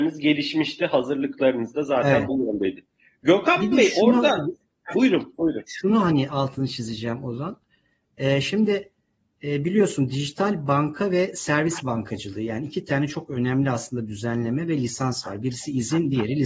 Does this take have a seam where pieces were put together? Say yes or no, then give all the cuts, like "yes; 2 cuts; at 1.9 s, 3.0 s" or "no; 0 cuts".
yes; 1 cut; at 4.9 s